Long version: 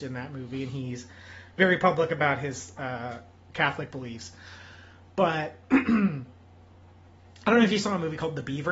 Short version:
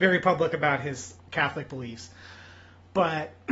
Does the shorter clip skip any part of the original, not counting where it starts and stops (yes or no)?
yes